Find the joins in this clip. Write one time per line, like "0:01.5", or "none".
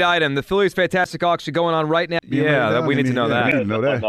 0:02.2